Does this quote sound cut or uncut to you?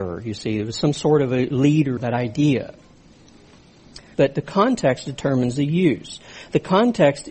cut